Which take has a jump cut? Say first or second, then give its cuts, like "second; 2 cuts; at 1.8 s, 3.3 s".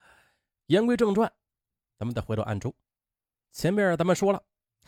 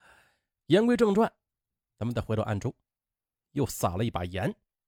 second; 1 cut; at 3.5 s